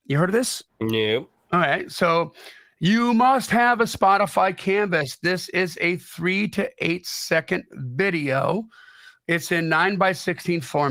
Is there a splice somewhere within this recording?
no; 0 cuts

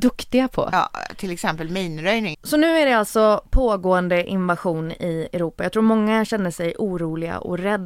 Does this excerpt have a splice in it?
yes; 1 cut; at 2.3 s

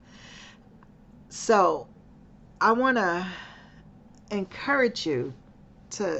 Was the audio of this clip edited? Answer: no; 0 cuts

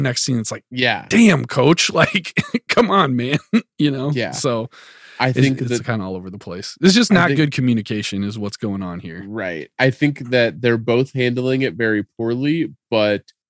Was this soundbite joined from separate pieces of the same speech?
no; 0 cuts

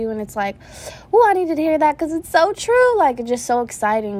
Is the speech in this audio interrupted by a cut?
no; 0 cuts

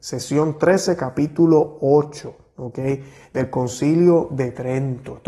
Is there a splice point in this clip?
no; 0 cuts

